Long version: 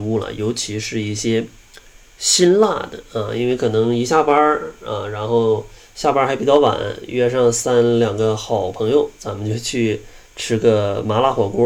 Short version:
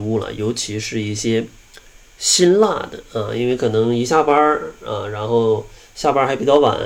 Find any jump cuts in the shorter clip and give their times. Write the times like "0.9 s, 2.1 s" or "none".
none